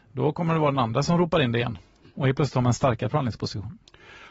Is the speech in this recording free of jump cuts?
yes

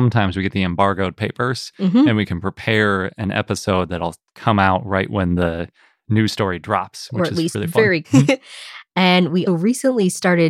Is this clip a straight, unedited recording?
no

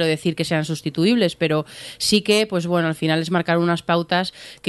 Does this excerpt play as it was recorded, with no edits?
yes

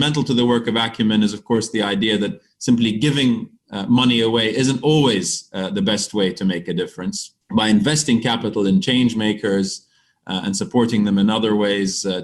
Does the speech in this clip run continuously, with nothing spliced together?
no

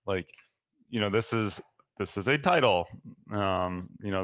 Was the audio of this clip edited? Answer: no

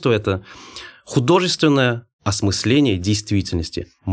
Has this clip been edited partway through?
no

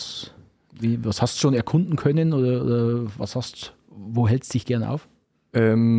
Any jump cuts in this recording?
no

